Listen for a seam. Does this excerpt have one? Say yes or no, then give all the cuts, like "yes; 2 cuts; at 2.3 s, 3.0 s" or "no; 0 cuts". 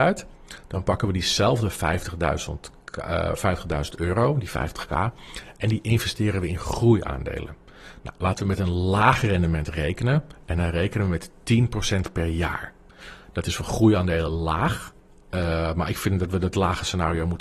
no; 0 cuts